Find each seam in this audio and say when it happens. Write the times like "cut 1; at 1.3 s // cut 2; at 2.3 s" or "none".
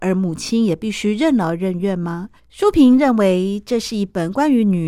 cut 1; at 2.4 s